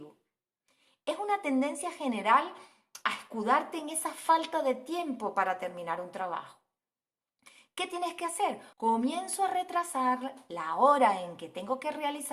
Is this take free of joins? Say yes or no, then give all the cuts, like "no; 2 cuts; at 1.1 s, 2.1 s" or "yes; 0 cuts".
no; 1 cut; at 8.7 s